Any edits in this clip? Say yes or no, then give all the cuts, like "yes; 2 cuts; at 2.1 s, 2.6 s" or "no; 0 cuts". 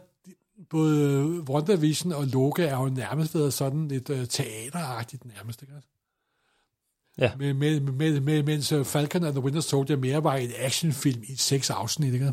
no; 0 cuts